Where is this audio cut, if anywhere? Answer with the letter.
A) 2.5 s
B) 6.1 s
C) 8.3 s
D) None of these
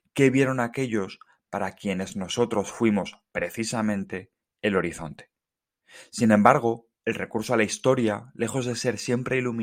D